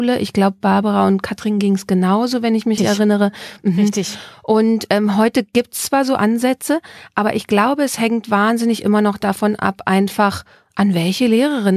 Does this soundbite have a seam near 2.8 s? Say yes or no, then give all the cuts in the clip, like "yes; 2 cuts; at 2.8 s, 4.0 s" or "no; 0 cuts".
yes; 1 cut; at 2.8 s